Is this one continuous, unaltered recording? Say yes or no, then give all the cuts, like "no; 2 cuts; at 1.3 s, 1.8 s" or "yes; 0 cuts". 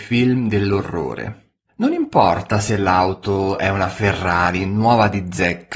yes; 0 cuts